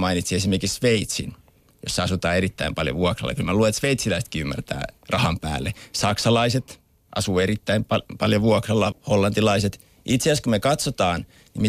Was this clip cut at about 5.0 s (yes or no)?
yes